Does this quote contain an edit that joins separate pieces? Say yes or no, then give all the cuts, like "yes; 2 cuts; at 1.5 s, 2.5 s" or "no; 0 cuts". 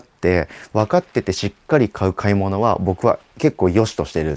no; 0 cuts